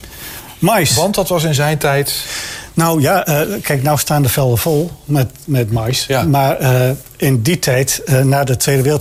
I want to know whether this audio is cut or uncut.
uncut